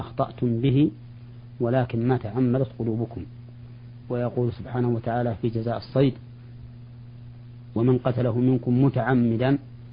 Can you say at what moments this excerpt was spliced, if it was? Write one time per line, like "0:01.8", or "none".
0:04.0